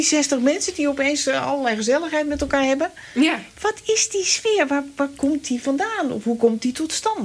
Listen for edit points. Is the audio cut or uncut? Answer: uncut